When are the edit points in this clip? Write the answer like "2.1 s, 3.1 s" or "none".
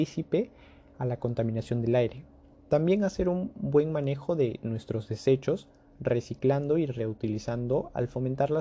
2.5 s

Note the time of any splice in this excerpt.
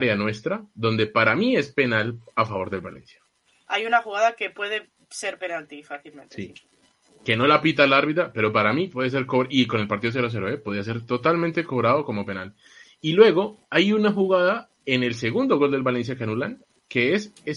none

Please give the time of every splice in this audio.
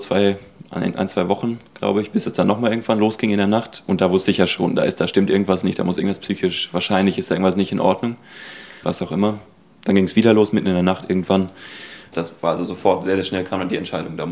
8.8 s, 12.1 s

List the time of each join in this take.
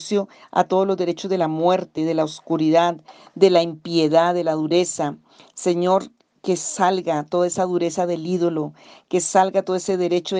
none

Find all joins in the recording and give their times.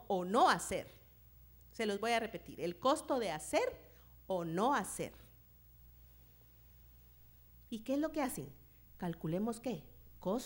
7.7 s

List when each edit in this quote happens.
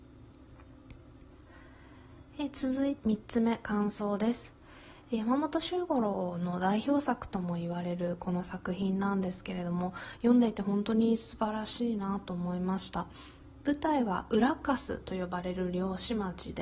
3.0 s

